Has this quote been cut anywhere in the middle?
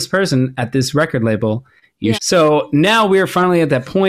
yes; 1 cut; at 2.1 s

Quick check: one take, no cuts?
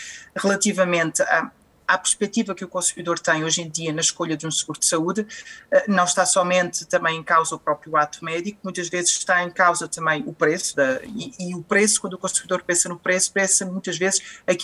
no; 1 cut; at 10.7 s

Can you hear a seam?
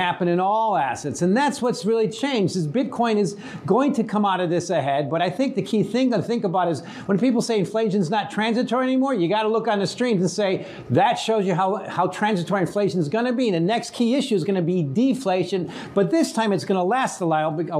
no; 0 cuts

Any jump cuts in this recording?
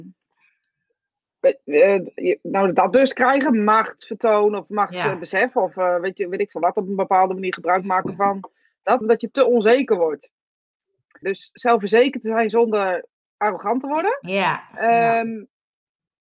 yes; 2 cuts; at 9.0 s, 11.2 s

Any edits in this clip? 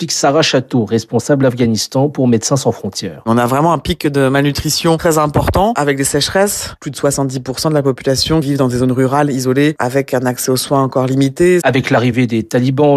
yes; 1 cut; at 11.6 s

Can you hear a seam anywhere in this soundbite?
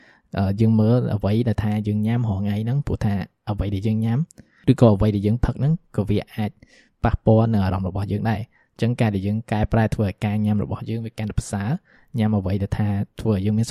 no; 0 cuts

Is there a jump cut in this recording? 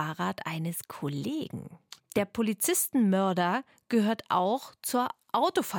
yes; 1 cut; at 2.0 s

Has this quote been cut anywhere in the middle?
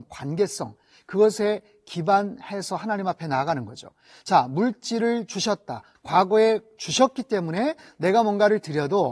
yes; 1 cut; at 6.0 s

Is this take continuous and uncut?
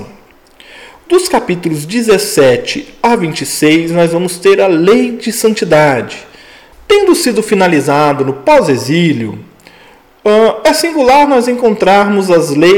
no; 1 cut; at 6.7 s

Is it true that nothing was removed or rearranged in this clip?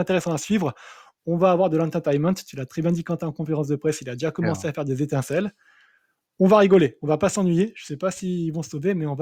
yes; 0 cuts

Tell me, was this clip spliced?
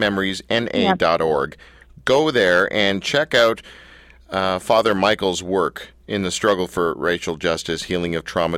no; 0 cuts

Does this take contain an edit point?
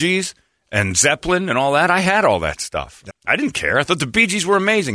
yes; 1 cut; at 3.1 s

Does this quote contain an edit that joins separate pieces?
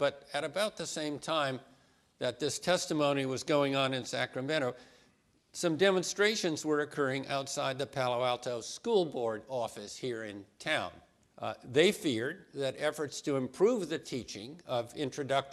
yes; 1 cut; at 11.3 s

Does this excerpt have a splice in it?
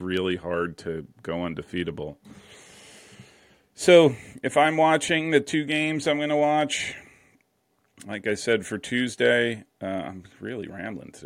no; 0 cuts

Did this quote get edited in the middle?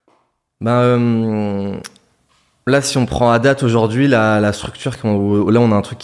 no; 0 cuts

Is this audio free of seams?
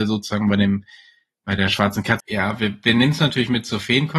no; 1 cut; at 2.2 s

